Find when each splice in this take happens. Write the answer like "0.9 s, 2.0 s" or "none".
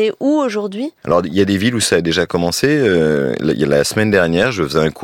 1.0 s